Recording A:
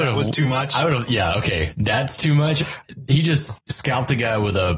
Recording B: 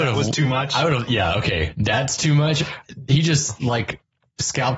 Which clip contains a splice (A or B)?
A